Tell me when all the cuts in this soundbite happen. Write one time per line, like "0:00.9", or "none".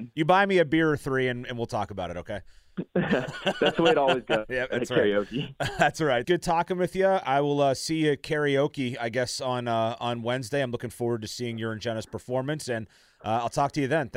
0:06.2